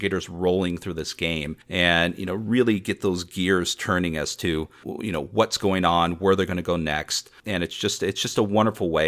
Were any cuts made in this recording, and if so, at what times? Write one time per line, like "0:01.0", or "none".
0:01.6